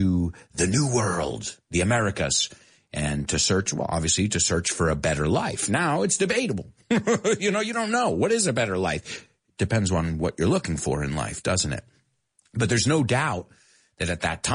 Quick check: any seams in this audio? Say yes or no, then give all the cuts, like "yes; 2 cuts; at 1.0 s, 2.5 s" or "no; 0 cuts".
no; 0 cuts